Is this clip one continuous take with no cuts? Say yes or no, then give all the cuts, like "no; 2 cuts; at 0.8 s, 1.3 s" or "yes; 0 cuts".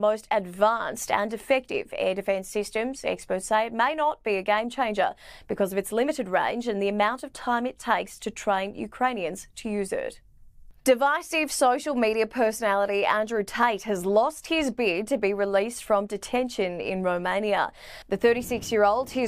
yes; 0 cuts